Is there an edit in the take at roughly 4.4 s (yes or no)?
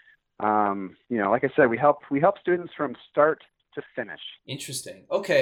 yes